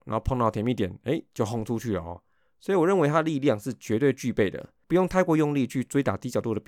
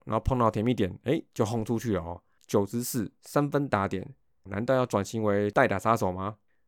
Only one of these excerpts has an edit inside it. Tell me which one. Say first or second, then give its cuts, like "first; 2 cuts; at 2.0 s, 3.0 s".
second; 2 cuts; at 2.4 s, 4.5 s